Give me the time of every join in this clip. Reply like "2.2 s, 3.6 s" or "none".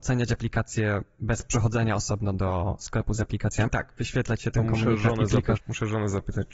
3.7 s, 5.6 s